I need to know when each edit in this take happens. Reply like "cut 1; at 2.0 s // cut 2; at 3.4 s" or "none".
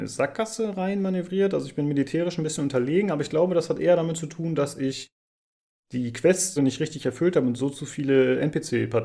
cut 1; at 6.6 s